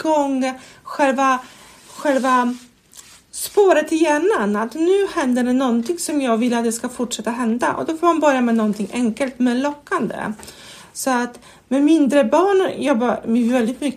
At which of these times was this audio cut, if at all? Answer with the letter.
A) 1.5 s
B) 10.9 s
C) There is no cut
C